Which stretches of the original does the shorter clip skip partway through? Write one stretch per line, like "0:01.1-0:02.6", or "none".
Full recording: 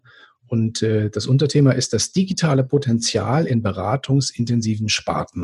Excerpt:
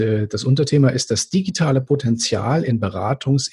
none